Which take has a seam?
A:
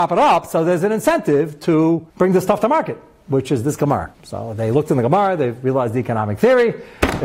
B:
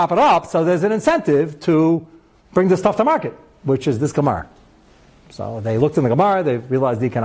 A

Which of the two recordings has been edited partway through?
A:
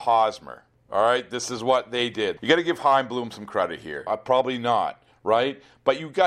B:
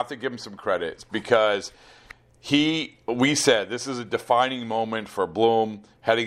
A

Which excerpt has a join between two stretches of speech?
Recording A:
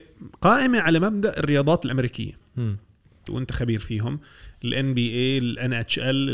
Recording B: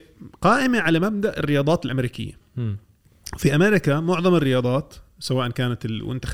A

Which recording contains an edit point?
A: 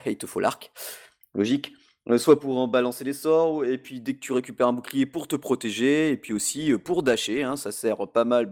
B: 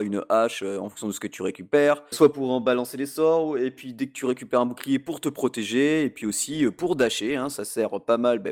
B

